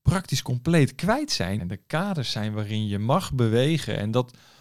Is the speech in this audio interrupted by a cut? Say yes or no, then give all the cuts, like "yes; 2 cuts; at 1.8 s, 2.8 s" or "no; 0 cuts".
yes; 1 cut; at 1.6 s